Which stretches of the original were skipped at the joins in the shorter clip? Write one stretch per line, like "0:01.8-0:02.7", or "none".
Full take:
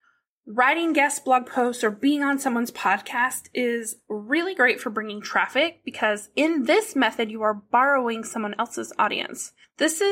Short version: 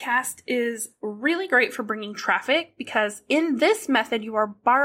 none